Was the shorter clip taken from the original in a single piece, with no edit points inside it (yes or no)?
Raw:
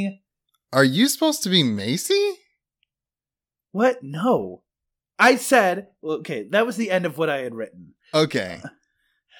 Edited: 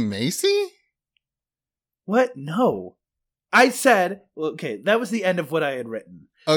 yes